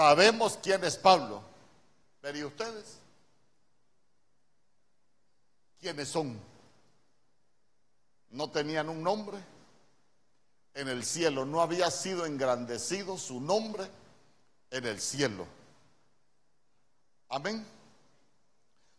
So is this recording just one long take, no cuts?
yes; 0 cuts

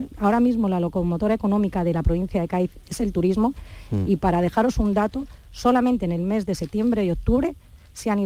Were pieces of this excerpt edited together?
no; 0 cuts

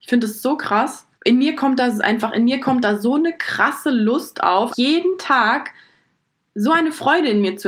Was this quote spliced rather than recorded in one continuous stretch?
yes; 2 cuts; at 1.1 s, 4.7 s

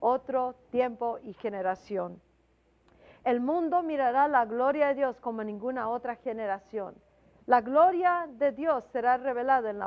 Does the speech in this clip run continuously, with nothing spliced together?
yes; 0 cuts

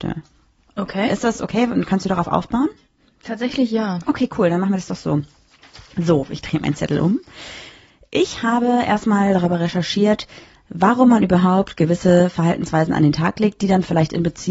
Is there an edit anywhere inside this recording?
no; 0 cuts

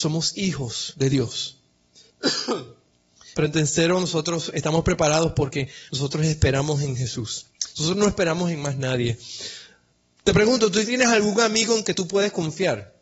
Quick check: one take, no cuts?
yes; 0 cuts

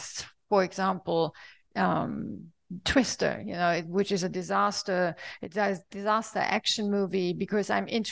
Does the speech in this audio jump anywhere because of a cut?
no; 0 cuts

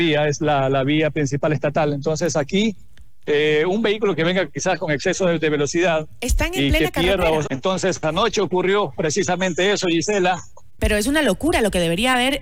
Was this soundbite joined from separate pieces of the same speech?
yes; 2 cuts; at 7.5 s, 10.8 s

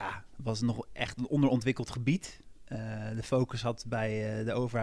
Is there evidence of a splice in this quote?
no; 0 cuts

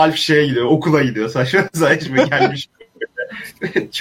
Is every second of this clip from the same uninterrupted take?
yes; 0 cuts

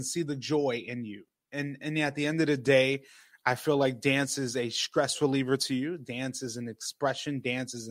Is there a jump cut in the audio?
no; 0 cuts

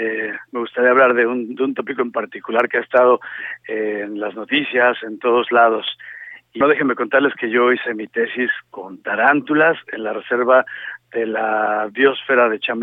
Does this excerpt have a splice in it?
yes; 1 cut; at 6.6 s

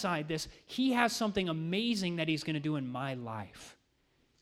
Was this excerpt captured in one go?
yes; 0 cuts

